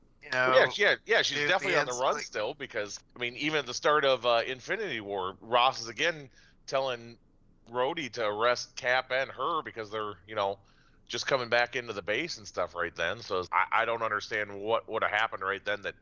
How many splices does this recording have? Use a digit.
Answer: 2